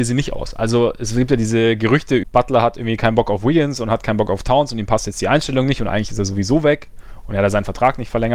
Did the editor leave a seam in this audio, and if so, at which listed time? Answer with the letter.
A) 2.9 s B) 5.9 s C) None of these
C